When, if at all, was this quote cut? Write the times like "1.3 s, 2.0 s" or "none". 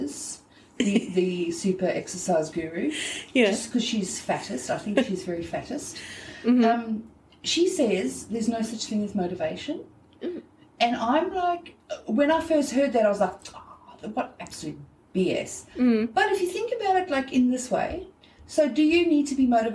none